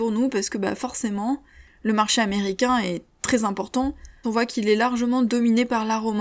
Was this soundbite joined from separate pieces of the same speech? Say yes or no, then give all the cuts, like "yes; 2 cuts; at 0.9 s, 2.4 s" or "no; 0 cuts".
yes; 1 cut; at 4.2 s